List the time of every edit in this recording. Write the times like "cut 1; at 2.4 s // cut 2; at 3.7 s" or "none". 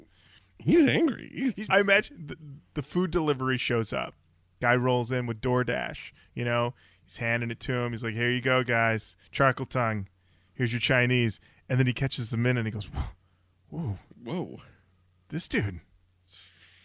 cut 1; at 1.7 s